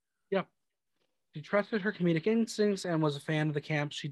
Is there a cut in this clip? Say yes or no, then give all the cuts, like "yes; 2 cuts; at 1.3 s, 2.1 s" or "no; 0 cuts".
yes; 1 cut; at 1.3 s